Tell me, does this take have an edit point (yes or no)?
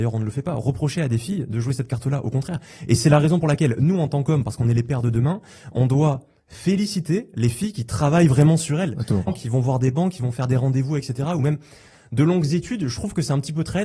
yes